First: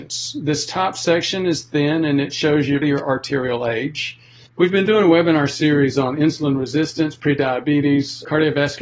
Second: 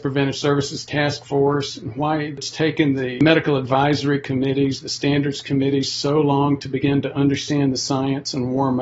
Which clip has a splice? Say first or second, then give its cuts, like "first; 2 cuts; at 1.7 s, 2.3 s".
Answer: first; 2 cuts; at 2.8 s, 4.5 s